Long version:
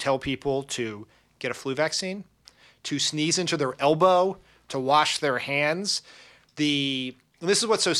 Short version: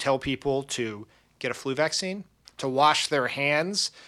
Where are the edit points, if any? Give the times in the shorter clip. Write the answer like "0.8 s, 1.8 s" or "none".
2.5 s

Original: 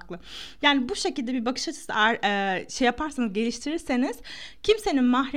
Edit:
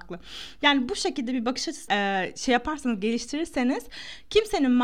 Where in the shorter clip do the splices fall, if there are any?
1.9 s

